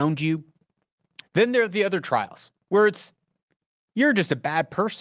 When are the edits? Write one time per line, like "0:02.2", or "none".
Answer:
0:01.2